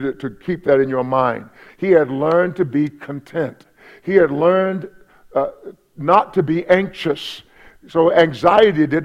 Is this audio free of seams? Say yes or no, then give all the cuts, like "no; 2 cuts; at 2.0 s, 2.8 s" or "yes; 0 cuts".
no; 1 cut; at 1.7 s